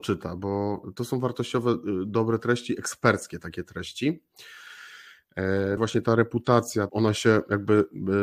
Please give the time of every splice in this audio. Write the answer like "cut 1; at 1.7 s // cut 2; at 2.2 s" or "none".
cut 1; at 5.8 s // cut 2; at 6.9 s